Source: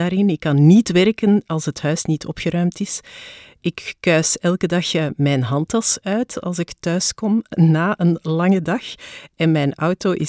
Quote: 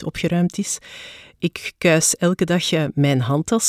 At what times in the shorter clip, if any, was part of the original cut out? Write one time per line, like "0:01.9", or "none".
none